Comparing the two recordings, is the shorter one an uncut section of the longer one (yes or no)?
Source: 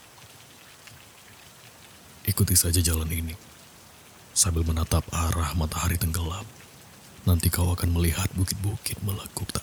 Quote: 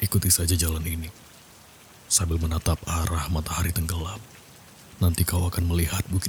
yes